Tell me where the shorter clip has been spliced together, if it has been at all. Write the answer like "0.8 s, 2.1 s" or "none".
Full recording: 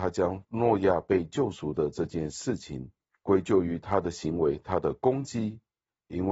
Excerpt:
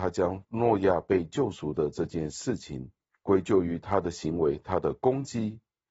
none